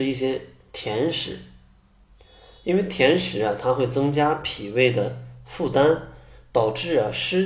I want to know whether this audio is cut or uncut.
uncut